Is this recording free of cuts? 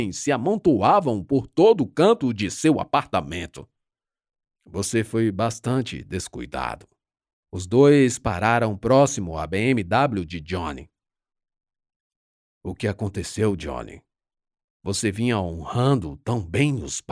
no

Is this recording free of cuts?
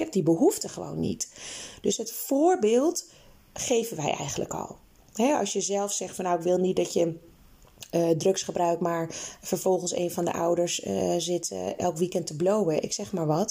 yes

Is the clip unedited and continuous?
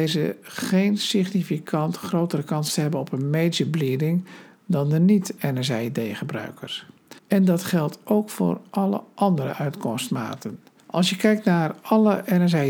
no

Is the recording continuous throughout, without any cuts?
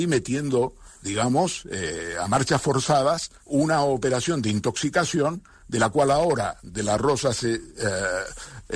no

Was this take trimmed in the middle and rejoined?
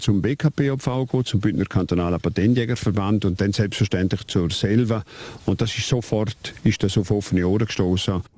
no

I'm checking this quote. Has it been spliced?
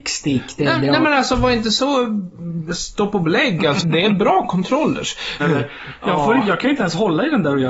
yes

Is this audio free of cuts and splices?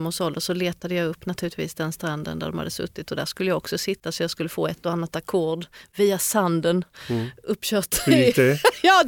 yes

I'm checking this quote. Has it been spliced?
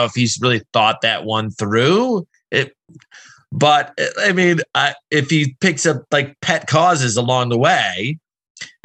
no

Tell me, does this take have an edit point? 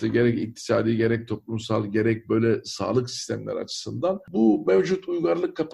no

